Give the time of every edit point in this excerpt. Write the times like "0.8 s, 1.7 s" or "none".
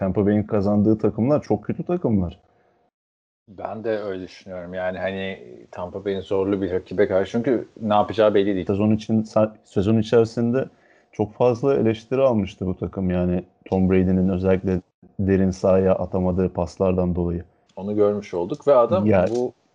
8.7 s, 17.7 s

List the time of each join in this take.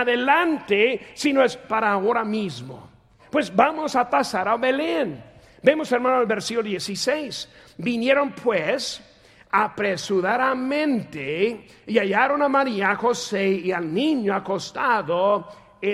3.2 s

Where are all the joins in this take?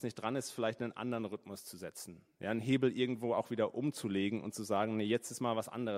none

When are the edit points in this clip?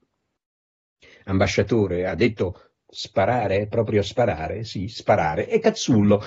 none

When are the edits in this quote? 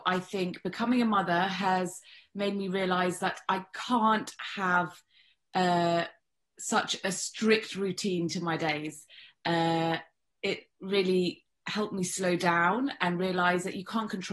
none

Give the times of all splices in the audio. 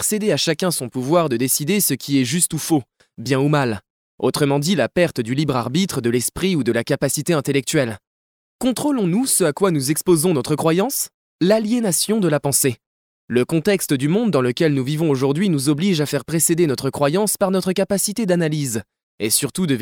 none

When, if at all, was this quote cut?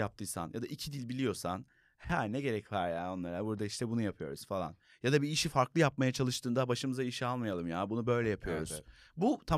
none

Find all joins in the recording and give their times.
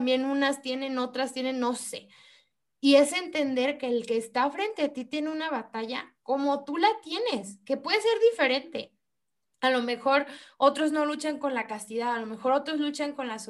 none

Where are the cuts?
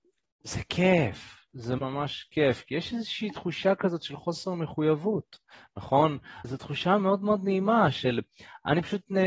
1.8 s, 6.4 s

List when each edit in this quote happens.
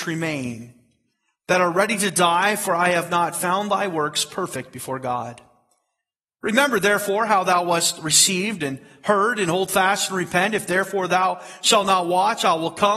none

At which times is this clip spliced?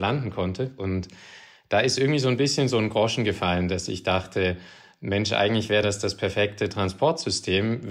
none

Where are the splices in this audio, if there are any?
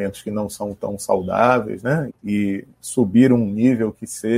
2.1 s

